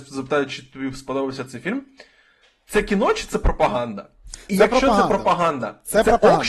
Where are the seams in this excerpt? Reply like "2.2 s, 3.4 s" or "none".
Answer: none